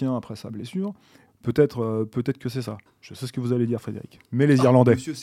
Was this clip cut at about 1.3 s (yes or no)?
yes